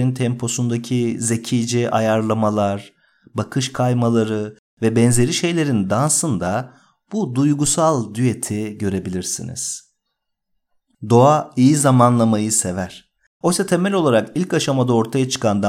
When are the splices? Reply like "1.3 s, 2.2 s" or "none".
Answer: 13.4 s

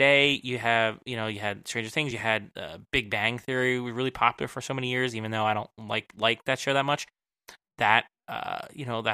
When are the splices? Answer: none

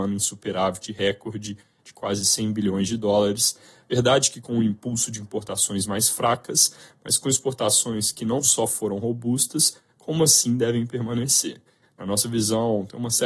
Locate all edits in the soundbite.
none

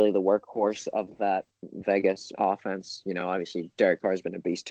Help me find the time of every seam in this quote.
none

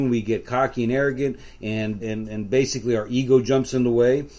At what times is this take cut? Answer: 2.0 s

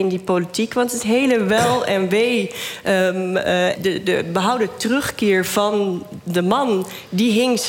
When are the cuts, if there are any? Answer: 3.7 s

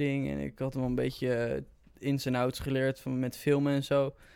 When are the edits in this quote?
none

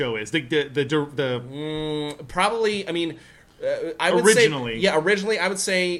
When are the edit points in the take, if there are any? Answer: none

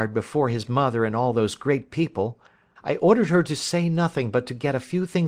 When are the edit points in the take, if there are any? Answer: 2.8 s

